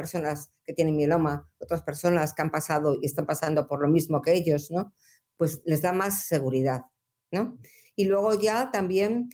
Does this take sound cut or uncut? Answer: uncut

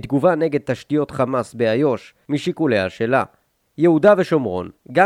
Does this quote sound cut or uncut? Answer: cut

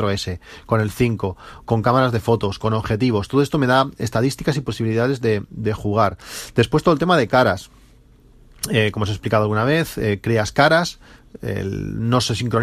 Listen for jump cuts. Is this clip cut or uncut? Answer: uncut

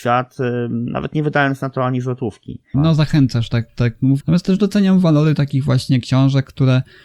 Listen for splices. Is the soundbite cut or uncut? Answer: cut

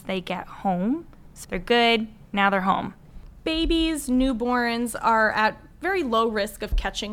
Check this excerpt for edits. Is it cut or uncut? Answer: cut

